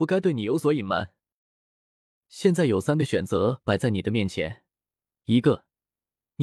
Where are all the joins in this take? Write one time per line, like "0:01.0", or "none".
0:02.2